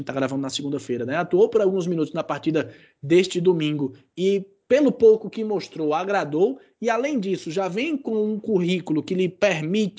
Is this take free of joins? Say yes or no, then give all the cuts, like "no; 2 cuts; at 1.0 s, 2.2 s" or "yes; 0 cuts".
yes; 0 cuts